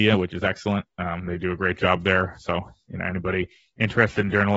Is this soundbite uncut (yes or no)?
yes